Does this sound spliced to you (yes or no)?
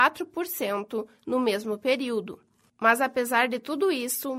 yes